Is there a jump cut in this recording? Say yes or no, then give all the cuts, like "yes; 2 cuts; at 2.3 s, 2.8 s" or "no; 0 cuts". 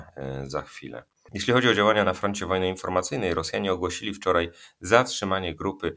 no; 0 cuts